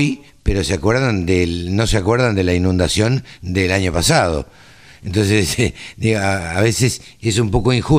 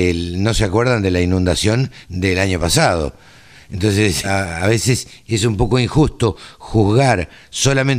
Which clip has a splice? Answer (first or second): second